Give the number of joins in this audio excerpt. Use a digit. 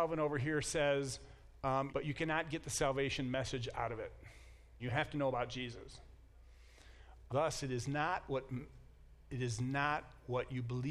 3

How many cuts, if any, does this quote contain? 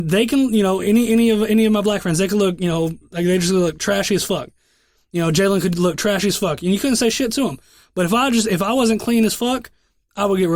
0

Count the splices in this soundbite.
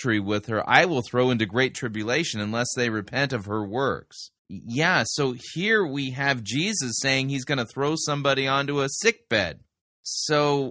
1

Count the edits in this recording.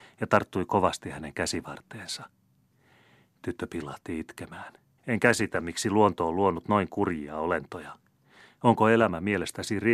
1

